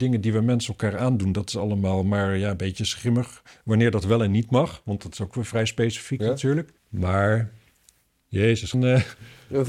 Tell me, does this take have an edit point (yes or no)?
yes